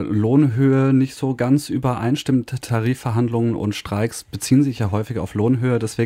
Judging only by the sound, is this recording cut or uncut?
uncut